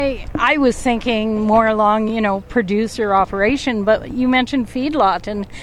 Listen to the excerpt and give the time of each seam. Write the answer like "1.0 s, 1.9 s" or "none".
none